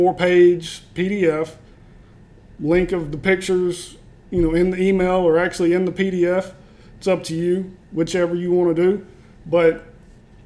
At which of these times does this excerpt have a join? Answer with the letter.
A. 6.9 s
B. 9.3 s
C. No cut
C